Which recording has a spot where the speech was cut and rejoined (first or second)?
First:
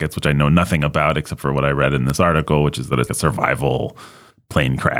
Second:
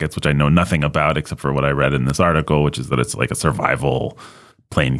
first